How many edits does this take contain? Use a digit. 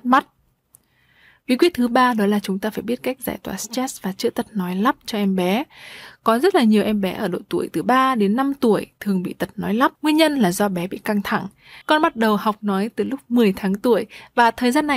2